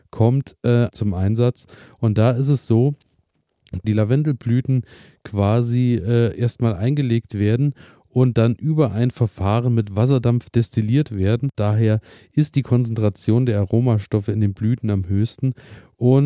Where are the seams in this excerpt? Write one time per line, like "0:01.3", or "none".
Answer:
0:00.9
0:03.8
0:11.5